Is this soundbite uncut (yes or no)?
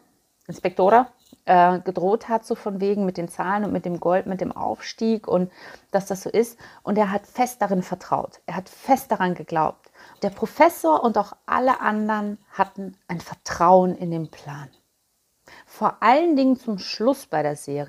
no